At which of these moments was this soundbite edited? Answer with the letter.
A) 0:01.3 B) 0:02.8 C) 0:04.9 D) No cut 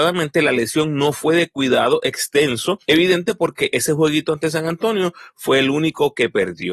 B